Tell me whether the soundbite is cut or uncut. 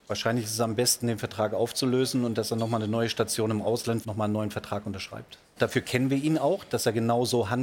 cut